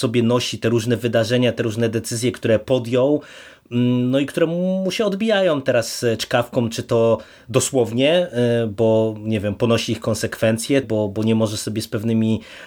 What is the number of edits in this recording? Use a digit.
1